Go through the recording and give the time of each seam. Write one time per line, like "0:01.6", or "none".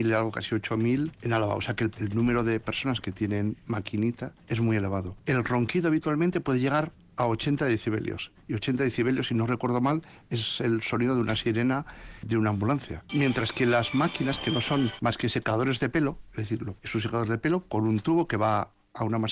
none